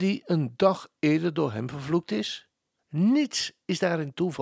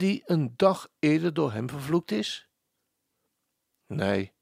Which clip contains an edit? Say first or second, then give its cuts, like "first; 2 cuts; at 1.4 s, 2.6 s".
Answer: first; 1 cut; at 2.8 s